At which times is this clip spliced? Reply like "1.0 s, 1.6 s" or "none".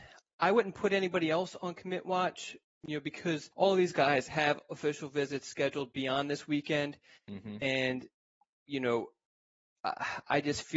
none